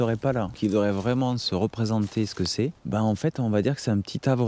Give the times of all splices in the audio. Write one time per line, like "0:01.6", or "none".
0:02.8